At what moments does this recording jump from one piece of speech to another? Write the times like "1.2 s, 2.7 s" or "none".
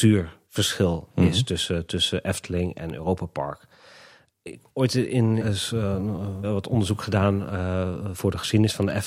5.4 s, 6.4 s, 8.1 s